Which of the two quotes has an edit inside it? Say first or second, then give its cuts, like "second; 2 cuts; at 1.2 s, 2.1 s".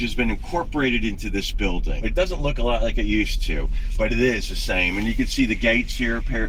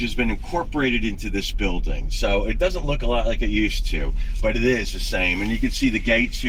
first; 1 cut; at 2.0 s